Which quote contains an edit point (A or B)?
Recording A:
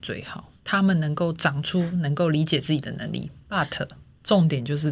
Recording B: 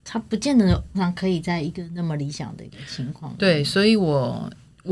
B